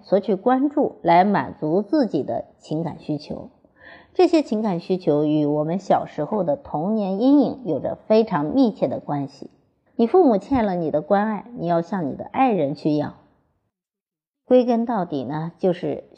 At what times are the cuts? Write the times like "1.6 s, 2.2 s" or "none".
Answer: 9.9 s